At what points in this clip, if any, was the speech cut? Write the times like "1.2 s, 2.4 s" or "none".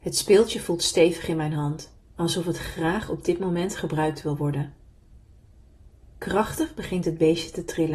2.1 s, 6.1 s